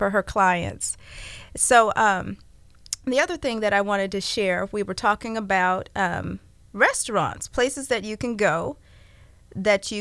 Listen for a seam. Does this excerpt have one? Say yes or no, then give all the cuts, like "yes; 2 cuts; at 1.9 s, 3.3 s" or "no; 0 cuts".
no; 0 cuts